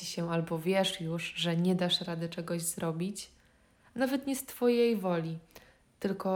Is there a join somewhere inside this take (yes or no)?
no